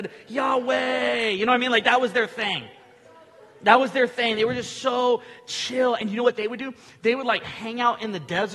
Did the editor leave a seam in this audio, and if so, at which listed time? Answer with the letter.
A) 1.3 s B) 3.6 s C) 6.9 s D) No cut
D